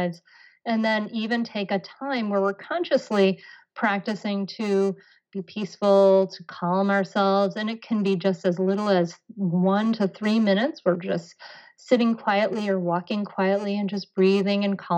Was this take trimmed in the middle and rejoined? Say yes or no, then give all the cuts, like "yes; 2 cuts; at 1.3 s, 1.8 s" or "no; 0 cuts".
no; 0 cuts